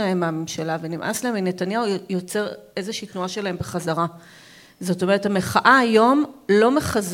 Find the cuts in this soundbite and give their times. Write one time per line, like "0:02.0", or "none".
none